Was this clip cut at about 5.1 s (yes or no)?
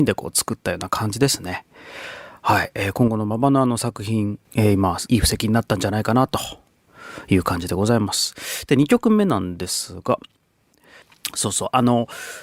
yes